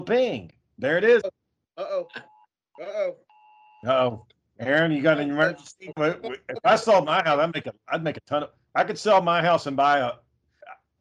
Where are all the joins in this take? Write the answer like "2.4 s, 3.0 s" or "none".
1.2 s, 5.9 s